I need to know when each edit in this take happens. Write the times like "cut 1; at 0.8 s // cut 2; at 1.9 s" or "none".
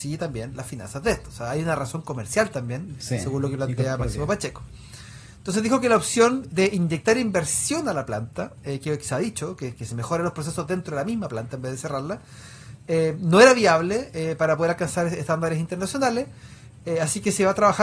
none